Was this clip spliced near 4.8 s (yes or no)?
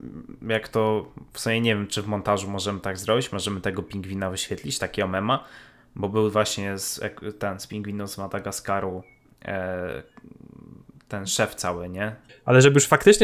no